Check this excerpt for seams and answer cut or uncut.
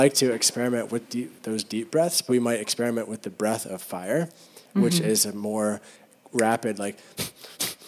cut